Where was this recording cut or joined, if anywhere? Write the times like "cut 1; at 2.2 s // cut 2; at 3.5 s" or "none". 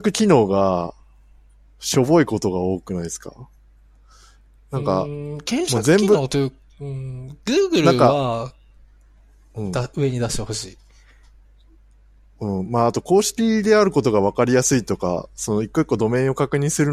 none